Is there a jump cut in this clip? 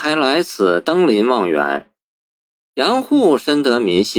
no; 0 cuts

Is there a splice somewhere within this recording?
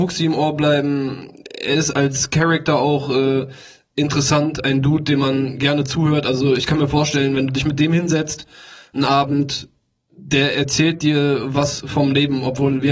no; 0 cuts

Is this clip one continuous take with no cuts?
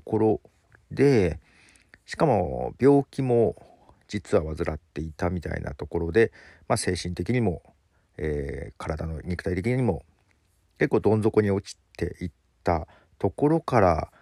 yes; 0 cuts

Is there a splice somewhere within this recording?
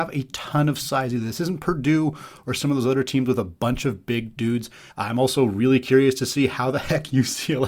yes; 1 cut; at 4.9 s

